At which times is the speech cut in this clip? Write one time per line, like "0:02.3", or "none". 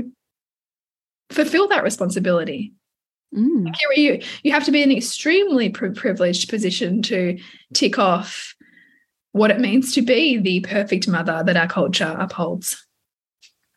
none